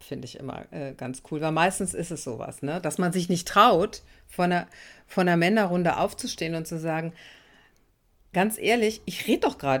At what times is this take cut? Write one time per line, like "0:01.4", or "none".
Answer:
none